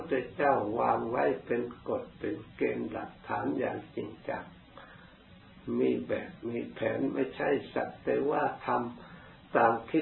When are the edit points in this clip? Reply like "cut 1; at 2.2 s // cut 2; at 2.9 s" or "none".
none

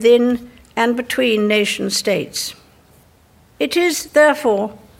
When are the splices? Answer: none

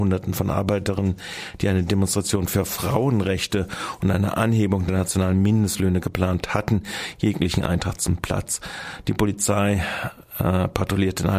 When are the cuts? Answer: none

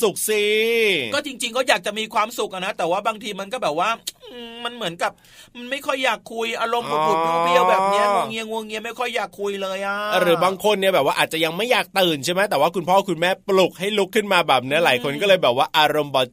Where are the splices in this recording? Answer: cut 1; at 13.4 s

